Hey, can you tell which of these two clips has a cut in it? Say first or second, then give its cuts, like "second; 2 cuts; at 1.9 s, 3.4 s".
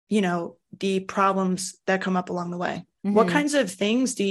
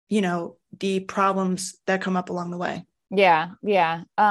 first; 1 cut; at 3.0 s